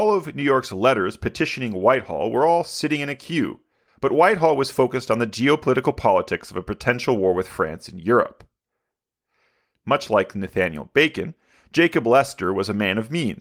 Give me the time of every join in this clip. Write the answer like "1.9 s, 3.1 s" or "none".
9.7 s